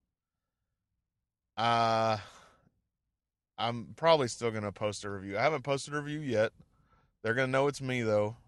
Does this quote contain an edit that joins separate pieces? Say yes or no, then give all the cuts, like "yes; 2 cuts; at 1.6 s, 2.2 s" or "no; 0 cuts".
no; 0 cuts